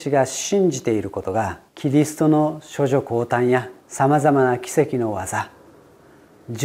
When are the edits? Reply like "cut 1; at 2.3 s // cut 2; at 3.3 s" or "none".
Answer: cut 1; at 1.7 s // cut 2; at 3.8 s